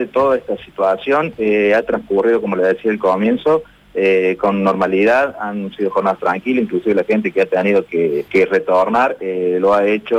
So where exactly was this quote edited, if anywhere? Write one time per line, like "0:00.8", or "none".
0:08.3